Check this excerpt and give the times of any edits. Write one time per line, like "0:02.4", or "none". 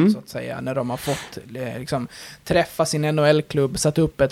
none

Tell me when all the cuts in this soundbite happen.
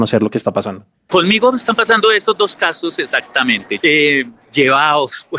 0:03.8

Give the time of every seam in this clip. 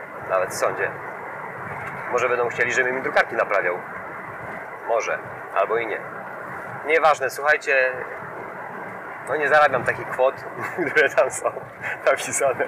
none

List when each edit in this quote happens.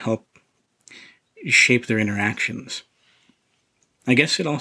none

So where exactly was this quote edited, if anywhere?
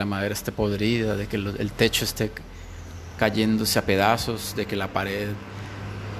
none

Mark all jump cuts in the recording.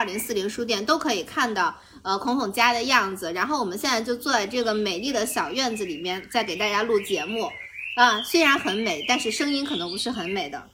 none

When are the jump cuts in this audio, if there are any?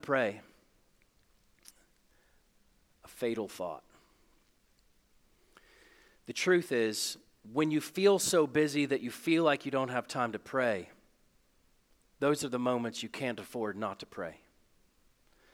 none

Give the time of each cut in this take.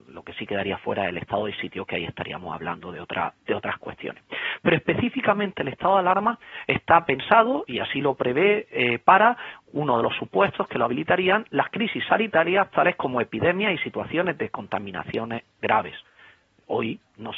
none

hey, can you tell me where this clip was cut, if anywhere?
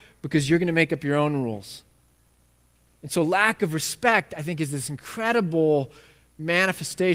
none

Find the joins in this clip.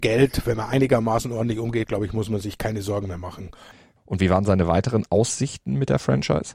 0:04.0

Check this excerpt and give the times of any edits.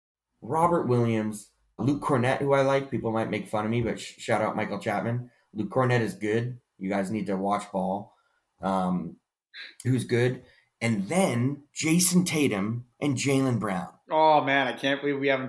0:01.8
0:09.8
0:11.7

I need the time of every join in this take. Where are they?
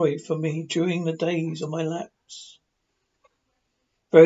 none

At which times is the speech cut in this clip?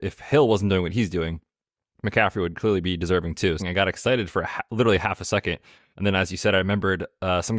0:03.6

